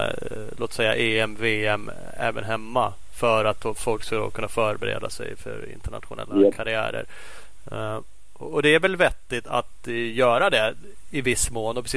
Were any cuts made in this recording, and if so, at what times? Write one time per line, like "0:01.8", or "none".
none